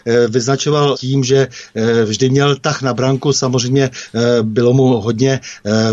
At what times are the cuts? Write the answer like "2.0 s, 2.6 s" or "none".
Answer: 0.9 s